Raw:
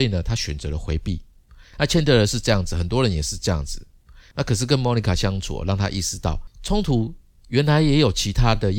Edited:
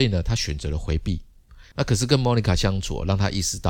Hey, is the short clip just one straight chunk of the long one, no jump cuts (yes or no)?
no